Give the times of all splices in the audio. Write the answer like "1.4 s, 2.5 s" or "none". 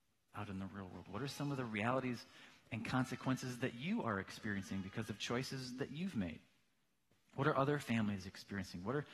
7.2 s